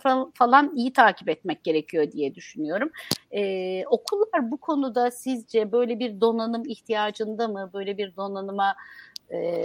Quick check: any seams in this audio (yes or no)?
no